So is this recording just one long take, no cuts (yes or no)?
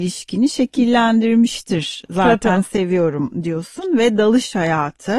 yes